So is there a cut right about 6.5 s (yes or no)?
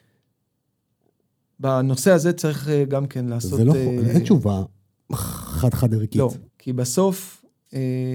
yes